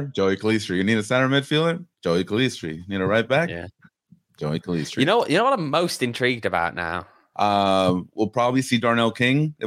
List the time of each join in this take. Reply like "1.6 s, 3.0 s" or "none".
7.3 s